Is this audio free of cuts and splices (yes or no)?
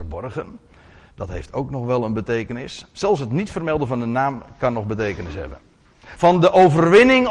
no